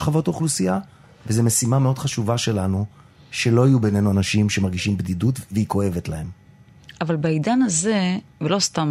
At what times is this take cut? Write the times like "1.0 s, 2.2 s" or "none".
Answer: none